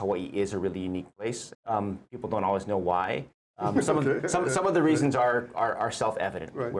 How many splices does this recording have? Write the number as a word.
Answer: two